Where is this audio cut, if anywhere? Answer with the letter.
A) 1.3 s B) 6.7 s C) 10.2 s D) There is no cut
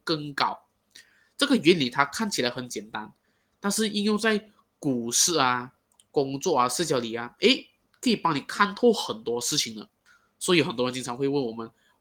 D